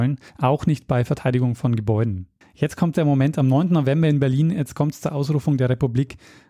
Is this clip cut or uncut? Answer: cut